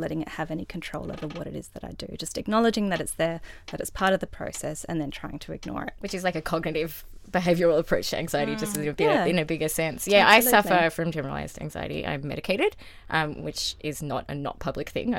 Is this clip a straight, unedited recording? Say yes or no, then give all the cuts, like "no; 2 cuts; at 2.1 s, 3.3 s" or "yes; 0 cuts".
yes; 0 cuts